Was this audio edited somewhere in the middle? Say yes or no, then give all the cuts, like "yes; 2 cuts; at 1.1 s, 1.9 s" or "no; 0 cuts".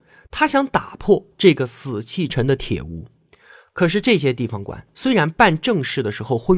yes; 1 cut; at 2.3 s